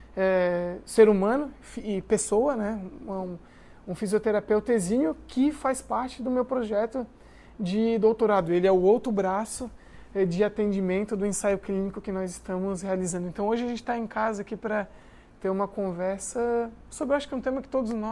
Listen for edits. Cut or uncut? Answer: uncut